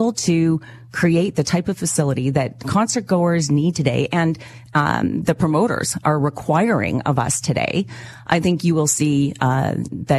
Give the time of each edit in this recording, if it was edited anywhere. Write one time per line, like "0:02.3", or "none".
none